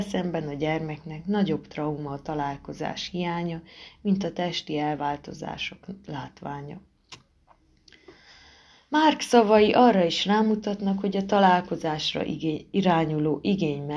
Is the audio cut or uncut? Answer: uncut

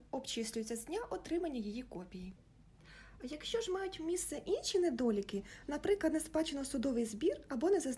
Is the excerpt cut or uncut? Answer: uncut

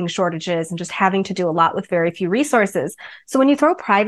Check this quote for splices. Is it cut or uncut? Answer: uncut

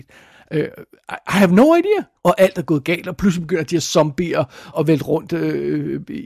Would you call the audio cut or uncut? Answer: cut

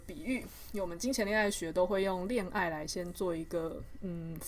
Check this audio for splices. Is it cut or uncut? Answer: uncut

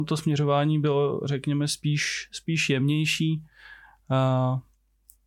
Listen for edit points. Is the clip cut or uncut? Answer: uncut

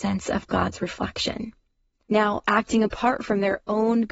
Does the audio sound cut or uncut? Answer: uncut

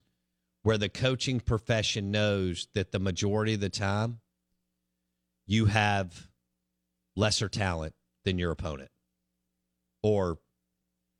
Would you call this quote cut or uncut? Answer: uncut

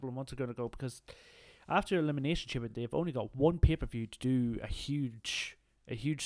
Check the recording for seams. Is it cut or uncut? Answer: uncut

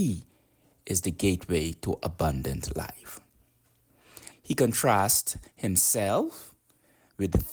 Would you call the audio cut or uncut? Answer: cut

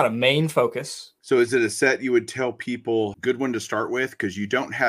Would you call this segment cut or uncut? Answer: cut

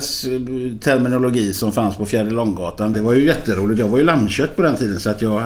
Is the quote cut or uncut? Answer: cut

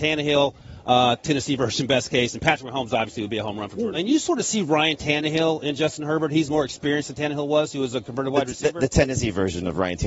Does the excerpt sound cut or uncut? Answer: cut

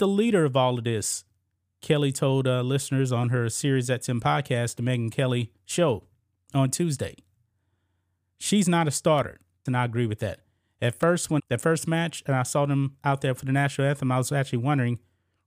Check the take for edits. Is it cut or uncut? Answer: cut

